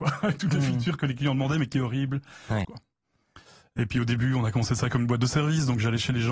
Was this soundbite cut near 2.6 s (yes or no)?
yes